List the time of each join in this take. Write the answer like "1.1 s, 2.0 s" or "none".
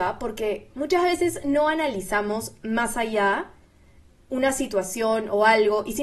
none